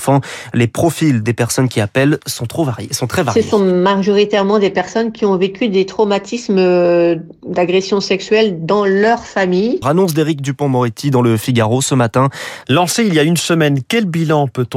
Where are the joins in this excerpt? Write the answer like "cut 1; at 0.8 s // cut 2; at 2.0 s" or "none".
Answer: cut 1; at 9.8 s // cut 2; at 12.6 s